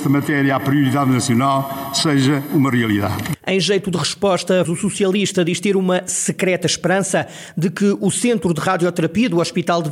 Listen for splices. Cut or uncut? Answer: cut